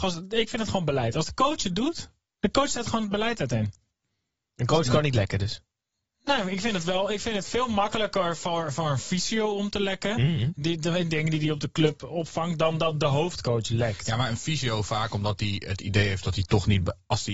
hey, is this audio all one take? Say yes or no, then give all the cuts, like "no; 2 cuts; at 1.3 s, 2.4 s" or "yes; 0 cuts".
yes; 0 cuts